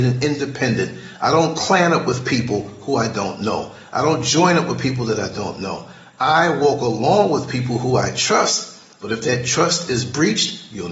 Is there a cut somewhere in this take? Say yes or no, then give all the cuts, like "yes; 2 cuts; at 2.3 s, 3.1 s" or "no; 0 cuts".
no; 0 cuts